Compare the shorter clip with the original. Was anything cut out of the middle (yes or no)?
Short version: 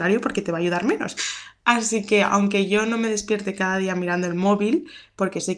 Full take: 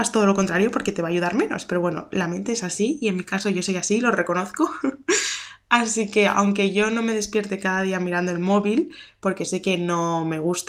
yes